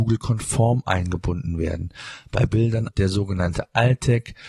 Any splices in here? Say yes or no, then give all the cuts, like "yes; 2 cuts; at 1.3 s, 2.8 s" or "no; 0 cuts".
yes; 1 cut; at 2.9 s